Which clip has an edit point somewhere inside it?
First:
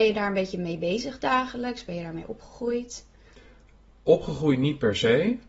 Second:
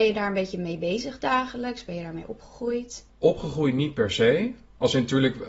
second; 1 cut; at 3.1 s

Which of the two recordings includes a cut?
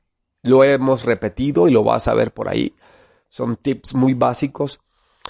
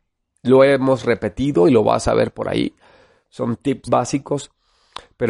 second; 1 cut; at 3.9 s

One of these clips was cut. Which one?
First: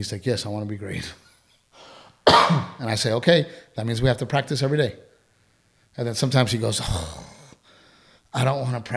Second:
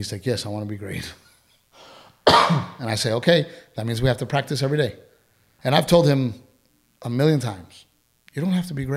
second; 1 cut; at 5.6 s

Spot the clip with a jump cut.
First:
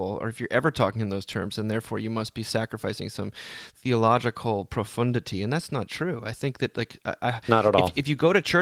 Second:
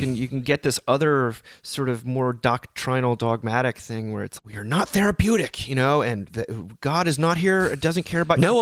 second; 1 cut; at 4.4 s

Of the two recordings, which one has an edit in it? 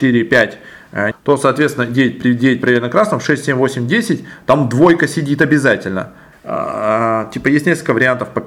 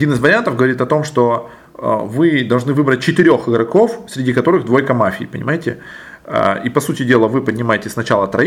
first; 2 cuts; at 1.1 s, 6.3 s

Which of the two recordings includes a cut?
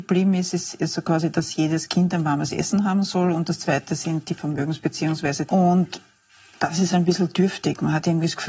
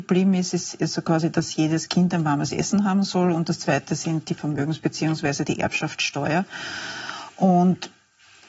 first; 2 cuts; at 5.5 s, 6.9 s

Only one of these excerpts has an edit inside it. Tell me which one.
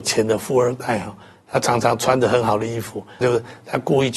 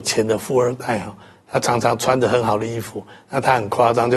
first; 1 cut; at 3.2 s

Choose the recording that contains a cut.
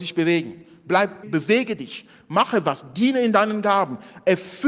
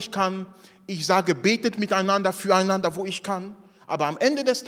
first; 1 cut; at 1.2 s

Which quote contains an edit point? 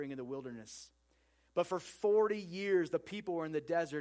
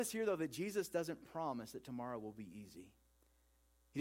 first; 1 cut; at 1.5 s

